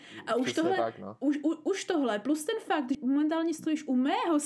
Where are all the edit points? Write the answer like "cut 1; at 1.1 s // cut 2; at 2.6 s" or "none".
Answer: cut 1; at 2.9 s